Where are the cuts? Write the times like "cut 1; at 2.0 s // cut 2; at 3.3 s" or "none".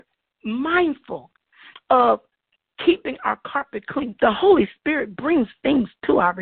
cut 1; at 4.2 s